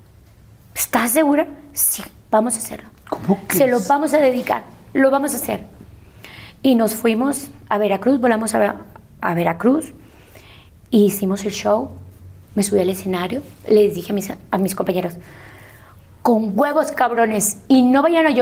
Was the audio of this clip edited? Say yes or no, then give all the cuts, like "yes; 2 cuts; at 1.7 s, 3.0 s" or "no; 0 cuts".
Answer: no; 0 cuts